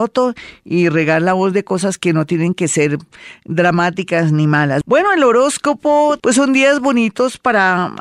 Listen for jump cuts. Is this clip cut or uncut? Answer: cut